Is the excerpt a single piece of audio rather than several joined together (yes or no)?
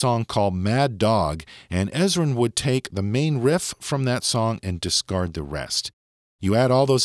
yes